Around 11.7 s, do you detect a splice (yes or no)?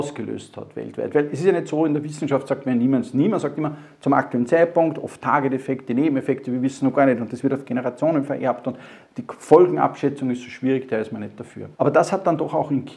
yes